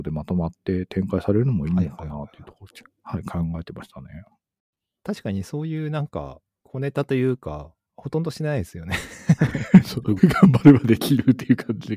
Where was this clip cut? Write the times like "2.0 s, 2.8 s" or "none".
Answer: 7.9 s, 10.2 s